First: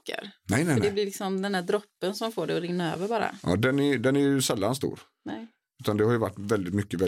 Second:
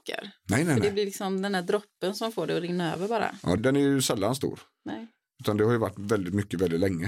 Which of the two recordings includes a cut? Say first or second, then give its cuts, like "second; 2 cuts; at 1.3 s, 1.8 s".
second; 1 cut; at 3.6 s